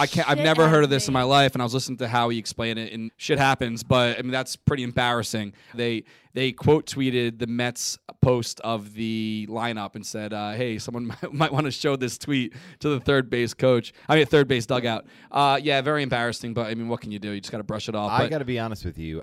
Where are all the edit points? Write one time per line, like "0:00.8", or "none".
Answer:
0:03.1
0:05.7